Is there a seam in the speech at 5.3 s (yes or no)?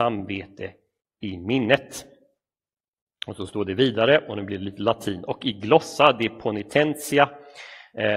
no